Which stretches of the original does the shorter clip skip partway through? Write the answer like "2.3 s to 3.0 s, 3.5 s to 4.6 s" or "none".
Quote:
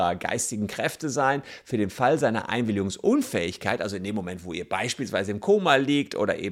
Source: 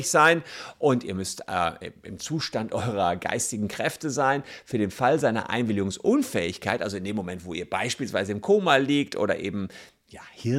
none